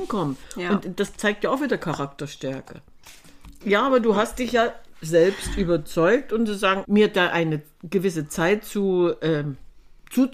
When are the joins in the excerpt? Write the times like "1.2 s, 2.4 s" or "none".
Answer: 3.6 s, 6.8 s